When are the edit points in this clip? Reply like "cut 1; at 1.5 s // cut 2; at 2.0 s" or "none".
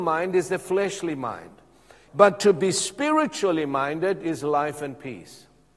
cut 1; at 2.1 s

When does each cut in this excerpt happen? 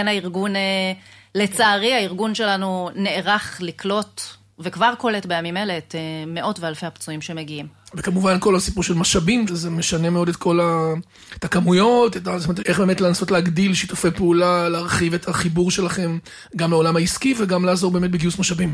cut 1; at 9.5 s // cut 2; at 12.6 s

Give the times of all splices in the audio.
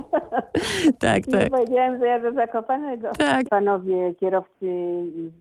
cut 1; at 3.4 s

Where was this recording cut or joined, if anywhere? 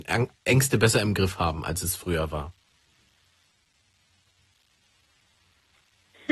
none

